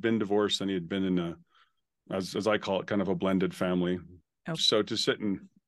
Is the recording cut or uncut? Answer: cut